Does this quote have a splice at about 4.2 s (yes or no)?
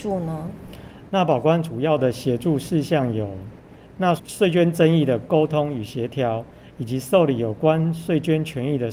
yes